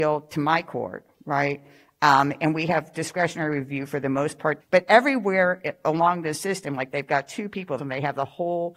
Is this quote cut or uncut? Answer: cut